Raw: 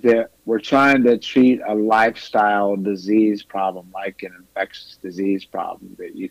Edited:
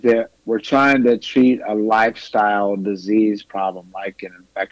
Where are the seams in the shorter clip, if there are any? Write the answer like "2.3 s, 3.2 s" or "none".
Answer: none